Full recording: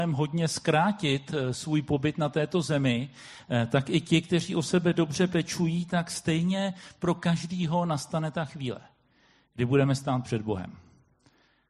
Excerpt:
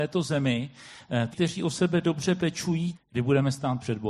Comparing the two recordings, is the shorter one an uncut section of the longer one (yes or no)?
no